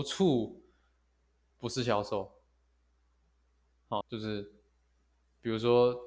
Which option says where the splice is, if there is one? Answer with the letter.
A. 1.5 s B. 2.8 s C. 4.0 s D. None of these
C